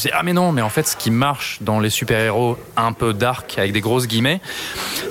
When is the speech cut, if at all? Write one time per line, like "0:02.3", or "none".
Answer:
none